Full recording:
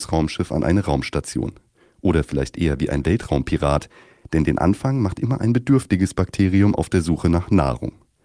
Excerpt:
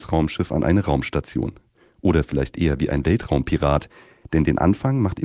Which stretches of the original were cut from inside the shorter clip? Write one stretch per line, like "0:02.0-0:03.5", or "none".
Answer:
none